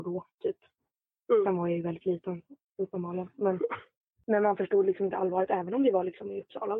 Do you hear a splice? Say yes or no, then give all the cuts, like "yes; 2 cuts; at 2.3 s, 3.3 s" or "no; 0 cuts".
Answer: no; 0 cuts